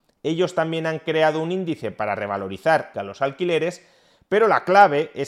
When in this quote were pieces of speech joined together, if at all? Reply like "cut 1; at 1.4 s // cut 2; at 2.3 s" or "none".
cut 1; at 2.9 s